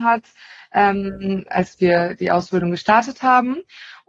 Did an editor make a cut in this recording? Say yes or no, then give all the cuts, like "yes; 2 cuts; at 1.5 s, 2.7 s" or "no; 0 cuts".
no; 0 cuts